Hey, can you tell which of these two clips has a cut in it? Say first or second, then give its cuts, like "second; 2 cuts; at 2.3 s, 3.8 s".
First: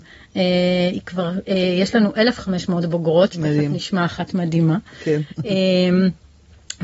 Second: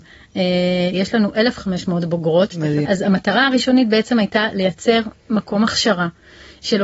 second; 2 cuts; at 0.9 s, 2.8 s